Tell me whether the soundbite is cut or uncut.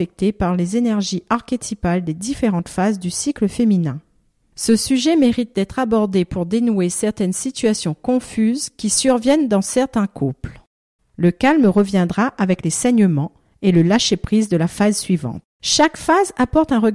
cut